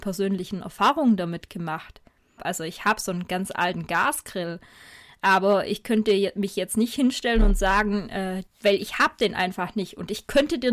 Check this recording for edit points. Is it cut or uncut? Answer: cut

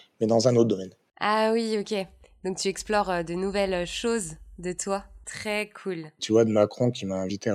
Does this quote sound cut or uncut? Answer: cut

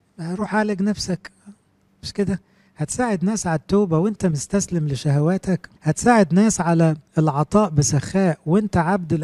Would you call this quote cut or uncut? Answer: cut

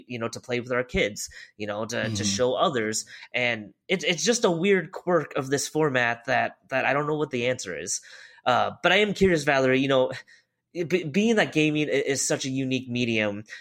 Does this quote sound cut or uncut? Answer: uncut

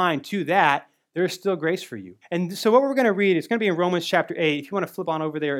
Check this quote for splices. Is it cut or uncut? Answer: cut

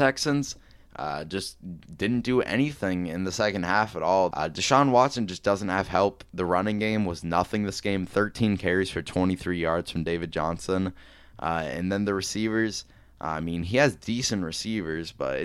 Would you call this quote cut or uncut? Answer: cut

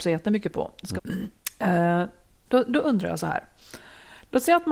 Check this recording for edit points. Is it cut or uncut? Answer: cut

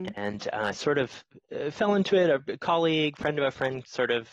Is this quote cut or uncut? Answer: uncut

